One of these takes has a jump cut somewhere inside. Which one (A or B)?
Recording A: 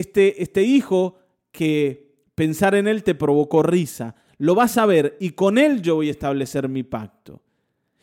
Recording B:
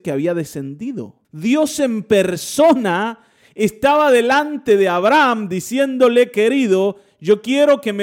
B